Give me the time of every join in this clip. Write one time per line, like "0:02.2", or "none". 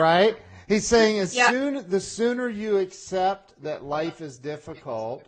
none